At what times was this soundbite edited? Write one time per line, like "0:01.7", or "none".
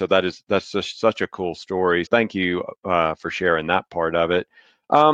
0:02.1